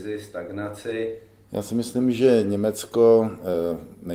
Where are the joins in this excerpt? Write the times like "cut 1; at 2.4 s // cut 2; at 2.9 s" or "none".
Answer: cut 1; at 1.5 s